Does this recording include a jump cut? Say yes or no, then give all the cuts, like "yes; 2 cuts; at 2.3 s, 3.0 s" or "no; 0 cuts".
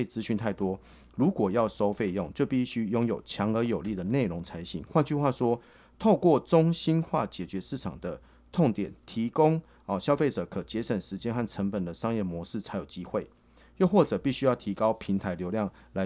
no; 0 cuts